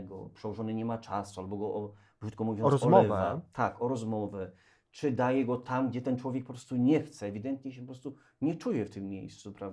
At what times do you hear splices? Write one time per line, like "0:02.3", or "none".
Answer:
none